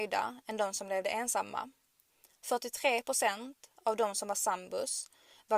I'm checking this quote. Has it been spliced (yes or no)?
no